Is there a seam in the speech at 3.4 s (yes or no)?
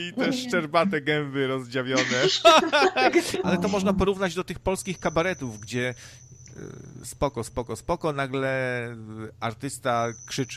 yes